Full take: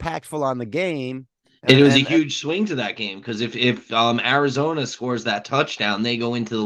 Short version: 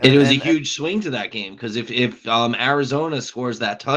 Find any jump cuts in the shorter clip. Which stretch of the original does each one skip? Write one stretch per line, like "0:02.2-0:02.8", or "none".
none